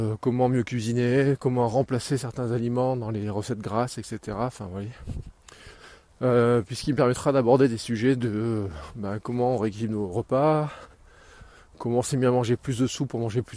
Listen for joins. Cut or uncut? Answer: cut